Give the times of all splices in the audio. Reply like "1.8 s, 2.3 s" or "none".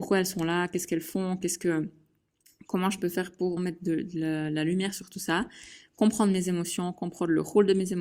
3.6 s